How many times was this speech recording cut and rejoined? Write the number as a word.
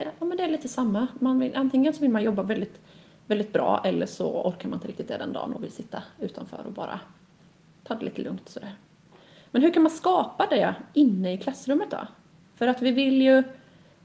zero